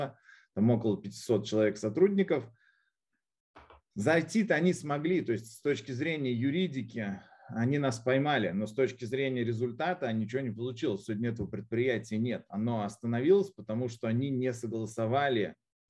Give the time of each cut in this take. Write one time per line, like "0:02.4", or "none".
none